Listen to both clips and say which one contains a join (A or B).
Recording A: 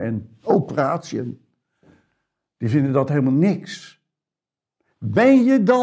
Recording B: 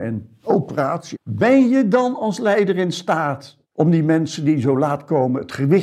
B